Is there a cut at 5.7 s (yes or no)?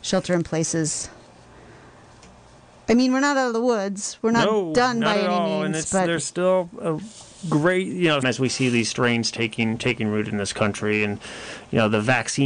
no